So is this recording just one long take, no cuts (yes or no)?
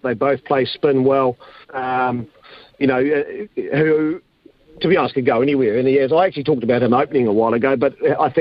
no